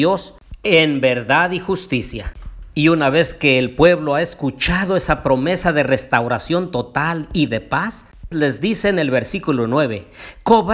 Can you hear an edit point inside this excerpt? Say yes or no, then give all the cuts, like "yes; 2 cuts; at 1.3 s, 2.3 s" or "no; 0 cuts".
yes; 1 cut; at 8.3 s